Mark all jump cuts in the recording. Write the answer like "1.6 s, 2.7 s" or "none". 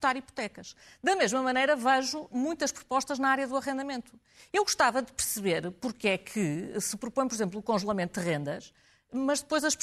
none